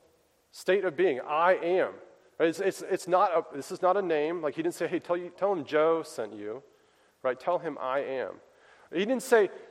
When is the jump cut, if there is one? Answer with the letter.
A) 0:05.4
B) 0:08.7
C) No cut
A